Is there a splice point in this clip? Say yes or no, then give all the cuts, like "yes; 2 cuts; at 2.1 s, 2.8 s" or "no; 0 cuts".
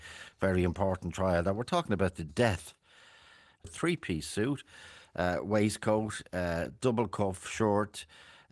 yes; 1 cut; at 3.6 s